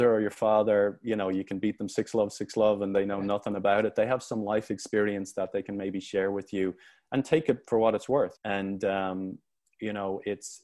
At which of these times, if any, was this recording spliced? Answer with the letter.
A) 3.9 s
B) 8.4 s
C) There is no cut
B